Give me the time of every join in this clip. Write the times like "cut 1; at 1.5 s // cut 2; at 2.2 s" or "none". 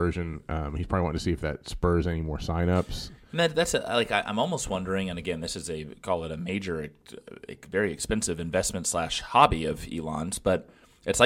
none

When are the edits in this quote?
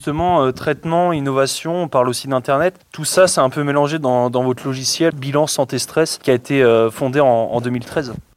none

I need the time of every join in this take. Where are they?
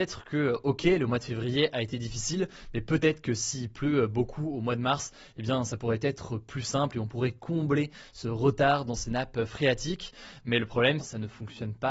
cut 1; at 11.0 s

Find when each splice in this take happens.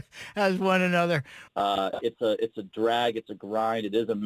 cut 1; at 1.5 s

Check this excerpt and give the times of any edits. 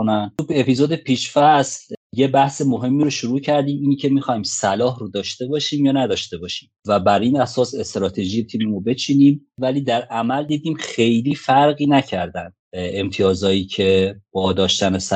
cut 1; at 6.8 s // cut 2; at 12.6 s

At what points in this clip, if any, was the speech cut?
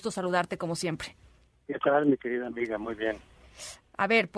none

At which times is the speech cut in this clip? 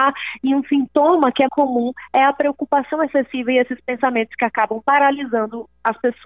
cut 1; at 1.5 s

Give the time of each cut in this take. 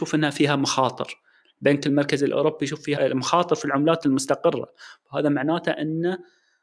cut 1; at 3.0 s

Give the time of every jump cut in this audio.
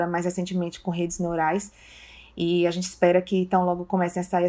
none

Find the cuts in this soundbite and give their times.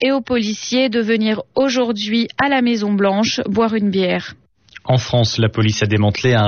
none

